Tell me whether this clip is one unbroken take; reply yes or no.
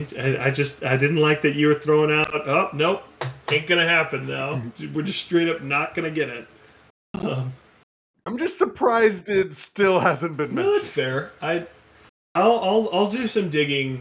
yes